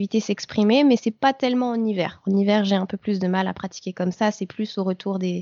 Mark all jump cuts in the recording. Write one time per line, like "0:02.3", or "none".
none